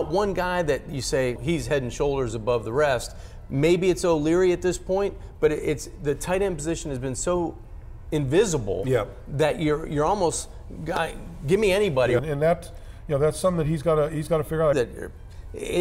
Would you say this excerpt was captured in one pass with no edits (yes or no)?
no